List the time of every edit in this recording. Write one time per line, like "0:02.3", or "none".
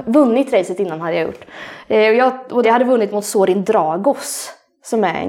0:02.6